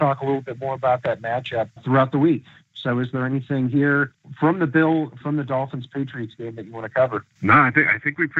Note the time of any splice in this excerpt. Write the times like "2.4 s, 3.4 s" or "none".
1.8 s, 5.2 s